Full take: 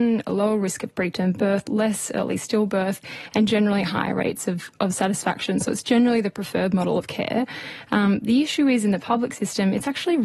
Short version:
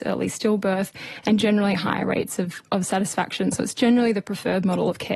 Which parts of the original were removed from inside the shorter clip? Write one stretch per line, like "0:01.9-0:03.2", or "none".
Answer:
none